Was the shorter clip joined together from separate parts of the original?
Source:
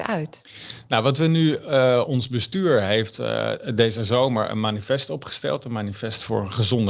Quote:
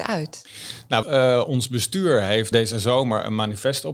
yes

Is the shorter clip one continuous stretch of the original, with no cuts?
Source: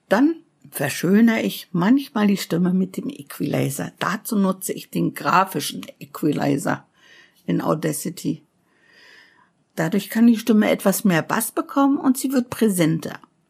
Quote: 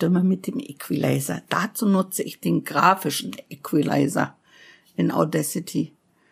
yes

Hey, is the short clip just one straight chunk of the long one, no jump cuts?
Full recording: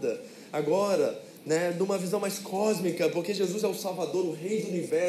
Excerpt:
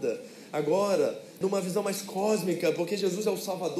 no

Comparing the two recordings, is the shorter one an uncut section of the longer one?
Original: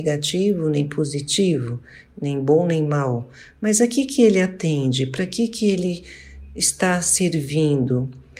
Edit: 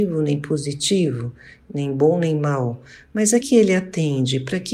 no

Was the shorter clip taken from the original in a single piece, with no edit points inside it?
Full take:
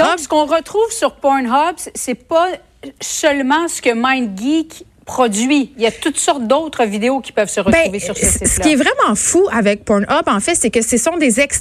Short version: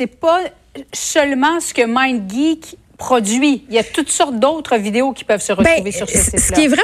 yes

